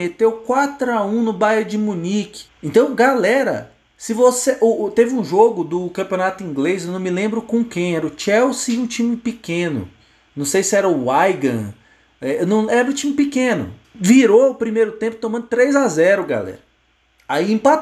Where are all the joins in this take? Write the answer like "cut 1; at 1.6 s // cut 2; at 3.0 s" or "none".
cut 1; at 2.5 s // cut 2; at 13.8 s